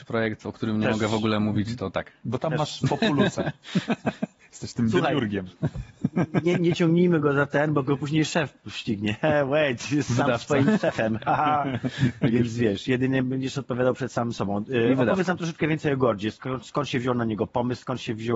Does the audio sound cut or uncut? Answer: uncut